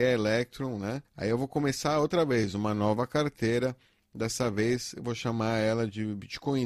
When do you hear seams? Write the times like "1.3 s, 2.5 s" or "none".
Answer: 1.1 s